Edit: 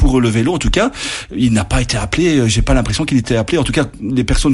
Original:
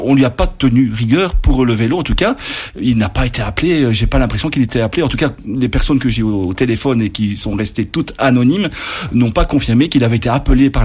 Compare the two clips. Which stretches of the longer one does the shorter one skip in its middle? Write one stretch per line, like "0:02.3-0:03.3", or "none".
none